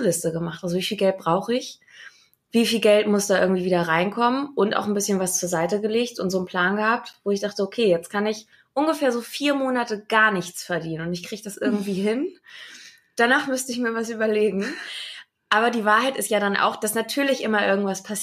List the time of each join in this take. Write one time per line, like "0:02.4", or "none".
none